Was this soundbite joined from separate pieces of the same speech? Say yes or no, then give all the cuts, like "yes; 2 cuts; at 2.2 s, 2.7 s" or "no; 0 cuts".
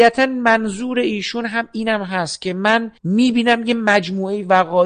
yes; 1 cut; at 3.0 s